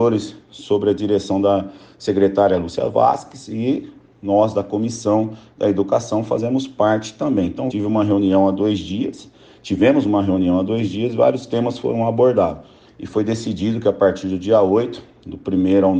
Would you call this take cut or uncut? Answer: cut